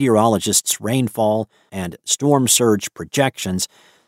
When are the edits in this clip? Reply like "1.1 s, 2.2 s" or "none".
1.7 s